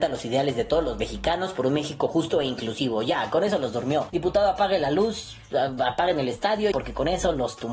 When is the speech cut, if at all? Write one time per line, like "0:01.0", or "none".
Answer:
0:06.7

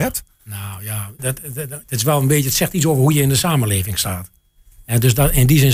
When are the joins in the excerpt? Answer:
0:01.2

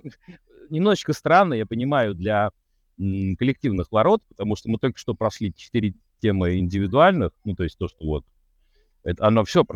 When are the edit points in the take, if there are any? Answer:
none

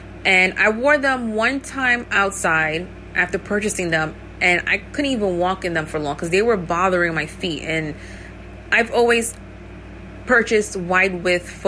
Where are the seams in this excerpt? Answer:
none

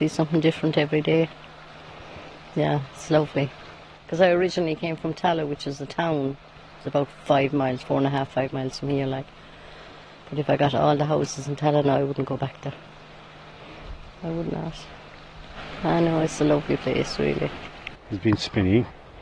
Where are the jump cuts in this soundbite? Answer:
0:14.1
0:17.9

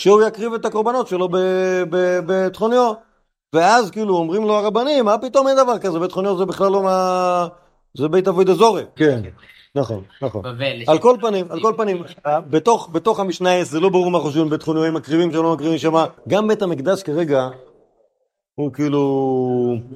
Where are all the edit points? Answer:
0:09.0
0:16.2

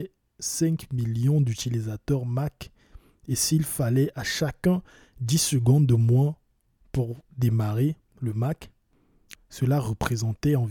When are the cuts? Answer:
0:09.3

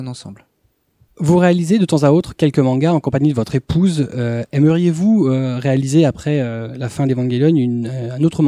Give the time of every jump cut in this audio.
none

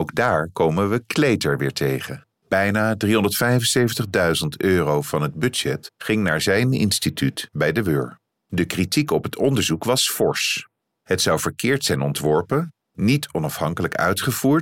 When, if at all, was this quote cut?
0:02.3
0:08.4

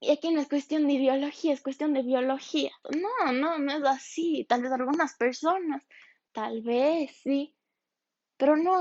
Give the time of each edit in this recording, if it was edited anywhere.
0:02.8

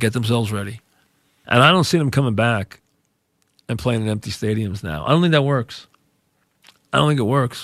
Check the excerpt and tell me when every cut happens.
0:01.4

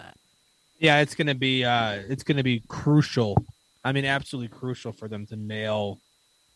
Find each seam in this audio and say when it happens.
none

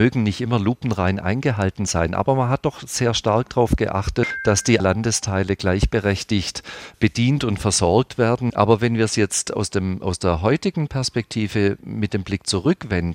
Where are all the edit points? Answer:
0:08.5

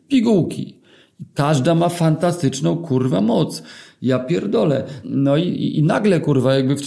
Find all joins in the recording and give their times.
0:05.0

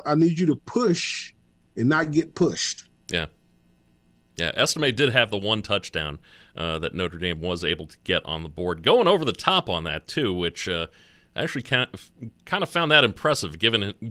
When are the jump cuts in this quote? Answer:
none

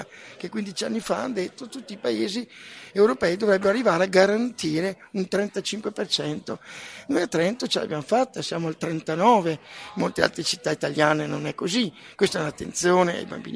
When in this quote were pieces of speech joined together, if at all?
none

